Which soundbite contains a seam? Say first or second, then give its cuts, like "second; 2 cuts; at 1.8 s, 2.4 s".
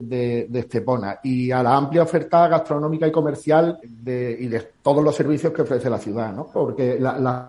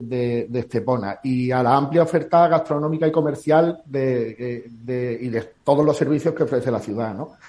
first; 2 cuts; at 3.8 s, 6.5 s